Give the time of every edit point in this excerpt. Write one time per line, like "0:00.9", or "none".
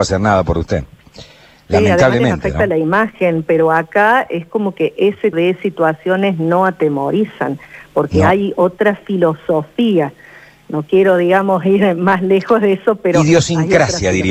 0:05.3